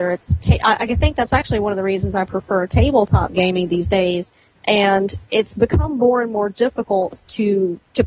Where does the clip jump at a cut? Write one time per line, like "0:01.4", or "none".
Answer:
0:04.5